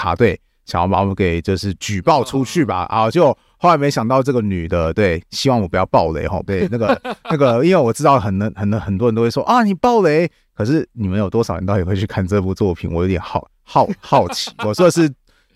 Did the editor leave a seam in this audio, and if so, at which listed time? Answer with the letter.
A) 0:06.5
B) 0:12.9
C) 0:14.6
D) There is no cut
A